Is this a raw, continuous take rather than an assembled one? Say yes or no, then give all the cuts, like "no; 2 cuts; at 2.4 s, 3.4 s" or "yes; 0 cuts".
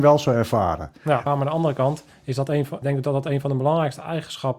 no; 2 cuts; at 1.3 s, 2.8 s